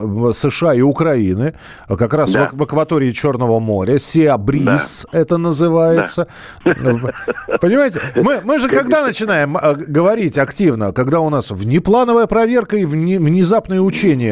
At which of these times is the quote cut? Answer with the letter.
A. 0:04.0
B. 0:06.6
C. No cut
B